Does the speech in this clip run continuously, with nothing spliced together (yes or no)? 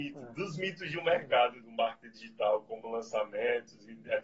no